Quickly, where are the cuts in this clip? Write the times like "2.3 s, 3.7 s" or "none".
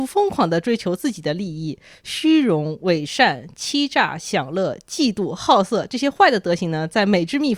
none